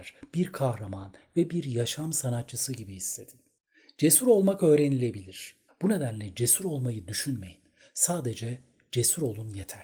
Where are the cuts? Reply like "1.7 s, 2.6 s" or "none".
5.7 s